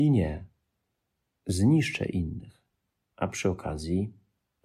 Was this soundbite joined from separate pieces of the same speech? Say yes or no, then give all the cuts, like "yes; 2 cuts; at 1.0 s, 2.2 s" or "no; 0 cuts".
yes; 1 cut; at 1.3 s